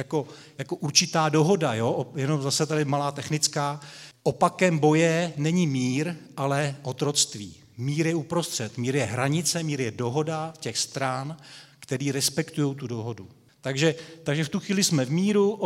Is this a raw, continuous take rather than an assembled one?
no; 2 cuts; at 4.1 s, 13.5 s

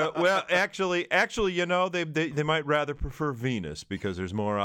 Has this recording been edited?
no; 0 cuts

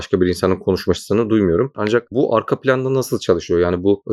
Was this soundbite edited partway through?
yes; 1 cut; at 1.7 s

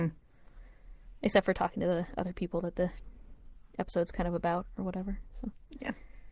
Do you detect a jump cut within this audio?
no; 0 cuts

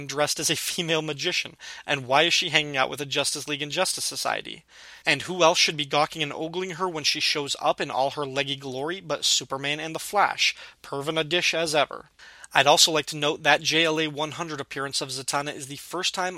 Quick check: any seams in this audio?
yes; 1 cut; at 5.0 s

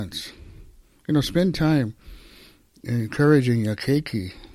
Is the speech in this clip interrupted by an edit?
no; 0 cuts

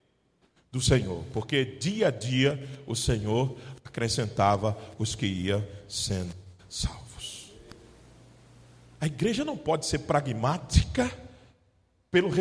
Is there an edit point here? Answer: no; 0 cuts

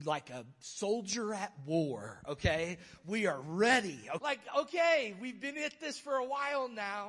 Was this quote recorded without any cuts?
no; 1 cut; at 4.2 s

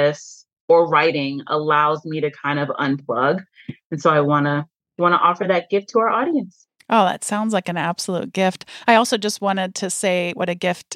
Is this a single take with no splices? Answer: yes; 0 cuts

